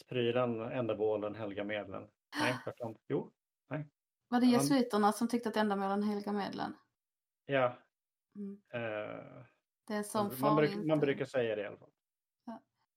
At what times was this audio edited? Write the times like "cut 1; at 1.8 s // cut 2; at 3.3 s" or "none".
none